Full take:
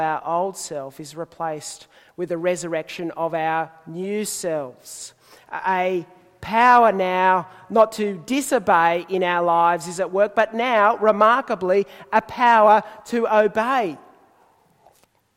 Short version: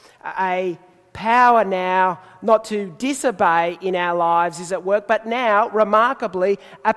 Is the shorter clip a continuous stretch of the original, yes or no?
yes